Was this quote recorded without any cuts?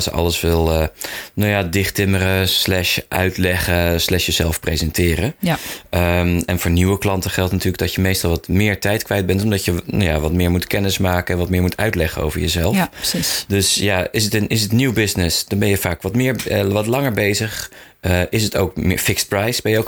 yes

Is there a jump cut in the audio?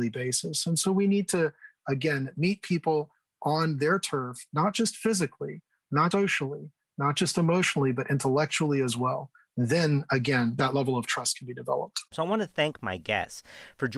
yes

